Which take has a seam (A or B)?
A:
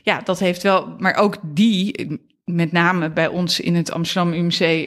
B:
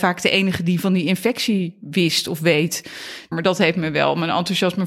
B